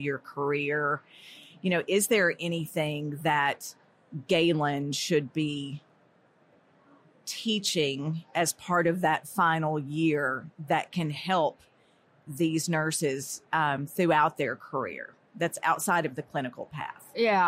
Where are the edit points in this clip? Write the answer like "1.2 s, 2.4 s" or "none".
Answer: none